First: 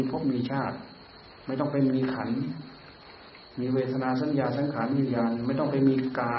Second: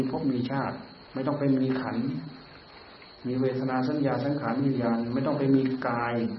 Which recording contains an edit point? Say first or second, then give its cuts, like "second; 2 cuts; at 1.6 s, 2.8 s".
second; 1 cut; at 1.1 s